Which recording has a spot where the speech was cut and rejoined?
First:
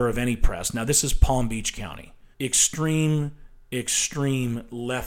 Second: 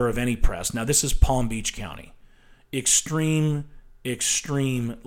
first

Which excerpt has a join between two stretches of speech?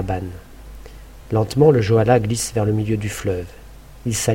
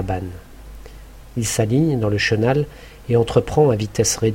second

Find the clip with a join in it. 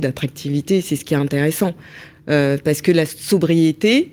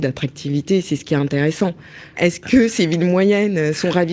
second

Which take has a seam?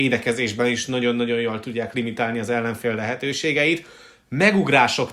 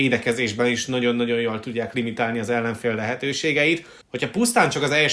second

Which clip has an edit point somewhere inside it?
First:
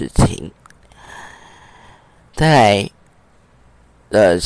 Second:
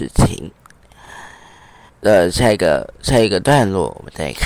second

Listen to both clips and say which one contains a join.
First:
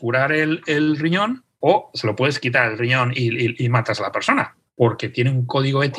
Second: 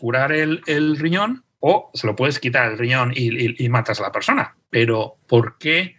first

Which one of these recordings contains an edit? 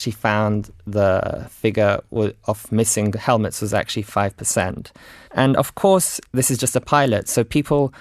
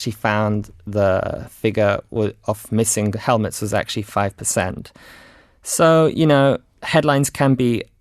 first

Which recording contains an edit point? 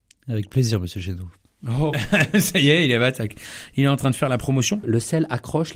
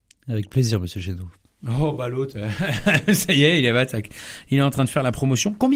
first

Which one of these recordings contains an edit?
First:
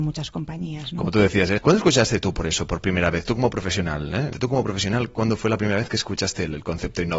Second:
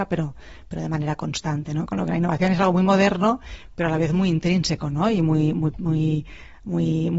first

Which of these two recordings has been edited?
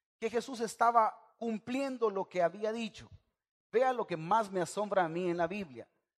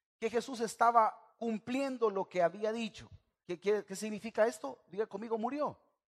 second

